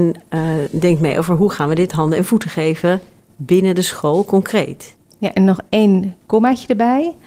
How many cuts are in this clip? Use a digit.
0